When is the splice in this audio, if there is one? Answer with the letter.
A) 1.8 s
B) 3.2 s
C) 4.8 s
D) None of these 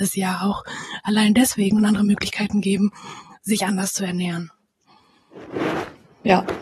A